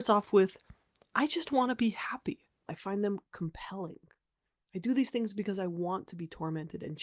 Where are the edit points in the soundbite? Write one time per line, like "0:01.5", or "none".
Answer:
0:02.7